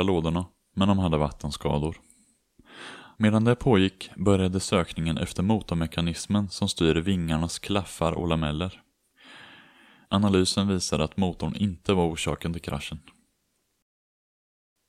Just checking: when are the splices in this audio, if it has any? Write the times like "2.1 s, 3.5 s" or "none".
3.1 s, 10.0 s